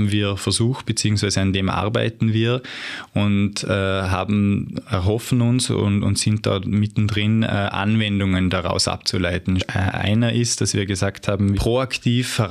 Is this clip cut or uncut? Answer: cut